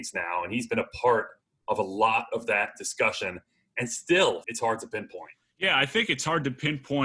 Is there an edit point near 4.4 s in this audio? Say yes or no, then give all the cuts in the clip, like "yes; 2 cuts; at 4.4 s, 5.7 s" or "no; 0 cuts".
yes; 1 cut; at 4.4 s